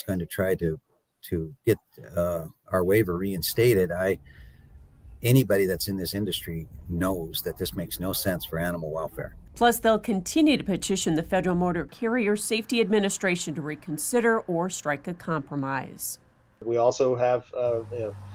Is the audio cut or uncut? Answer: uncut